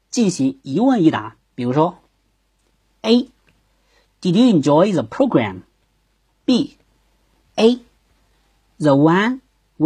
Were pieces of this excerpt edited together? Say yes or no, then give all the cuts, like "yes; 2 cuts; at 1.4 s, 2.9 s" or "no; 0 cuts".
yes; 1 cut; at 7.4 s